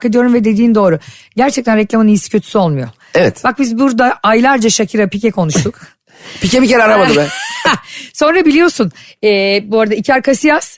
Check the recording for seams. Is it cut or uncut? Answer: uncut